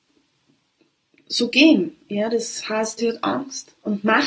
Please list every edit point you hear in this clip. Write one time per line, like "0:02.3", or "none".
0:03.0